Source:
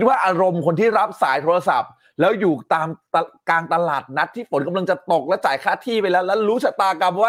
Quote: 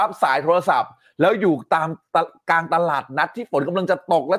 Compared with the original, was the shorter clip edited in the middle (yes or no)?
no